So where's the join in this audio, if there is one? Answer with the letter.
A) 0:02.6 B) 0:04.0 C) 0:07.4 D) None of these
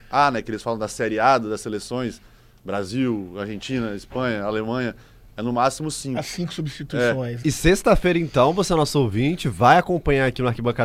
C